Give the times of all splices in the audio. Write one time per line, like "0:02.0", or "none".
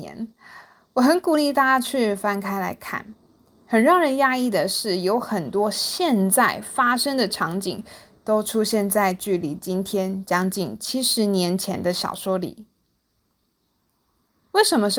none